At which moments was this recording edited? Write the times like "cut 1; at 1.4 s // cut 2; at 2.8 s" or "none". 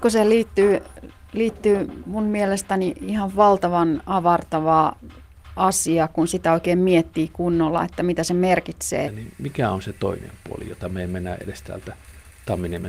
cut 1; at 9.0 s